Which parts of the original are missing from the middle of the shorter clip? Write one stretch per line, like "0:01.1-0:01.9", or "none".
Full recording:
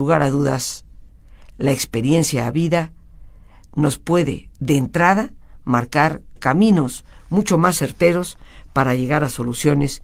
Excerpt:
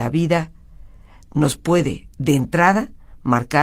none